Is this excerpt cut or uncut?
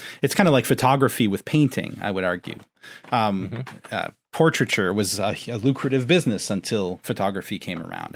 uncut